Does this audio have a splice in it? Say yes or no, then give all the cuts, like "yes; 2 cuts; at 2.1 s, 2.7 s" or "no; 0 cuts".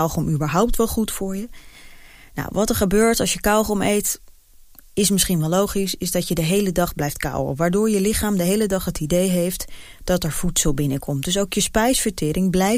no; 0 cuts